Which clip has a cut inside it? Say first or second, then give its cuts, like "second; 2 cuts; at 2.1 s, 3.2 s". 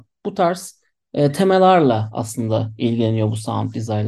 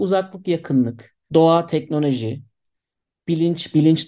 second; 1 cut; at 1.2 s